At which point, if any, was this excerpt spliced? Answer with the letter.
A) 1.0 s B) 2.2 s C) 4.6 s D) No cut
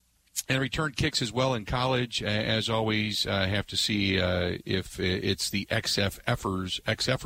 D